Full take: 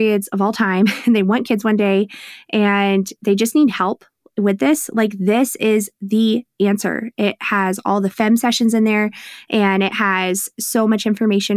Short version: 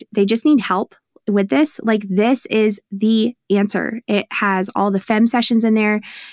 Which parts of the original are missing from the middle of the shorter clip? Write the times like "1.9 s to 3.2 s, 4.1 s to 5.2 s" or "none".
none